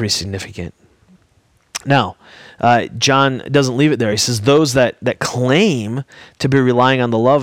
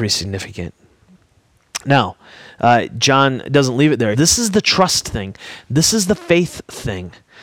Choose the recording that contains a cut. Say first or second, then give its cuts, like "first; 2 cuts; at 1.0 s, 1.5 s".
second; 1 cut; at 4.1 s